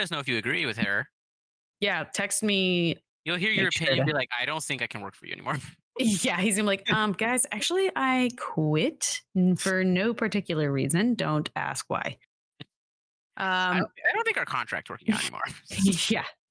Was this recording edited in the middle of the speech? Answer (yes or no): yes